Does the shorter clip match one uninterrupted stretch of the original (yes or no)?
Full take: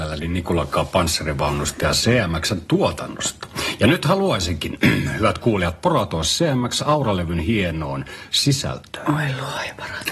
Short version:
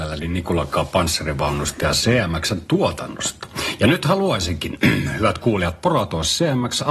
yes